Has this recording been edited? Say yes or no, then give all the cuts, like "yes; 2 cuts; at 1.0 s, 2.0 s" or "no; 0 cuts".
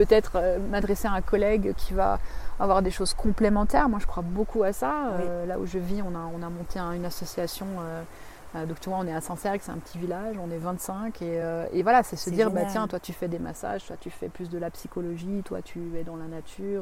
no; 0 cuts